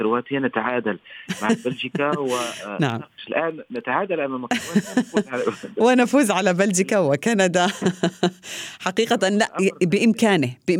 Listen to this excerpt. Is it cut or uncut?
uncut